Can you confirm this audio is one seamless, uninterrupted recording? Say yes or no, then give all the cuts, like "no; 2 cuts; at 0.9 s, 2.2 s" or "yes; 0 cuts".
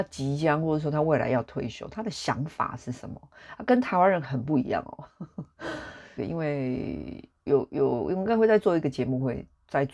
no; 2 cuts; at 6.2 s, 7.5 s